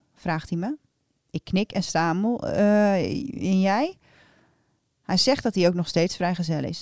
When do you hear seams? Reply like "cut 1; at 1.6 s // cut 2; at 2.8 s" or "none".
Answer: none

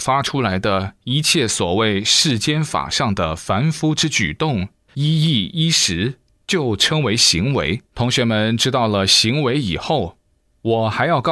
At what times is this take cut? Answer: cut 1; at 4.9 s // cut 2; at 7.9 s

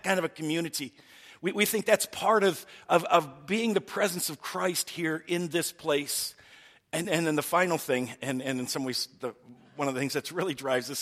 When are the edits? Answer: none

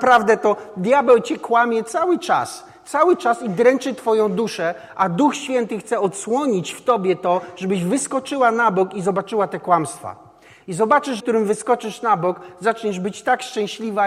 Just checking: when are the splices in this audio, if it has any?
cut 1; at 11.2 s

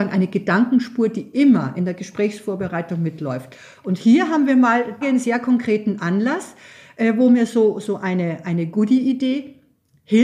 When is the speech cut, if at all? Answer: cut 1; at 5.0 s

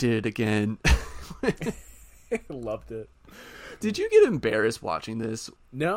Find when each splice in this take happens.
cut 1; at 3.8 s

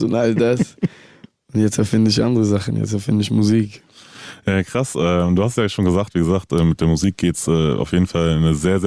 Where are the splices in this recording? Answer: none

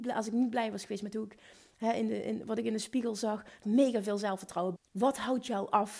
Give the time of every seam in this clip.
cut 1; at 3.6 s // cut 2; at 4.8 s

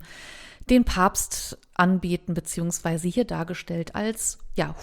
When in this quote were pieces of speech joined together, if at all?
none

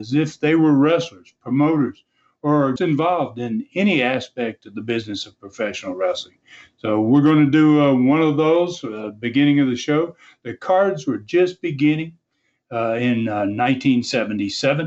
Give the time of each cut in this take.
cut 1; at 2.8 s

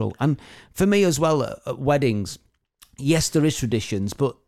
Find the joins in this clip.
none

